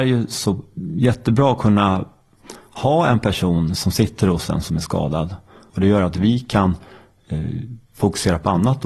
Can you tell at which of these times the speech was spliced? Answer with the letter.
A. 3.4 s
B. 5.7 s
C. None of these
B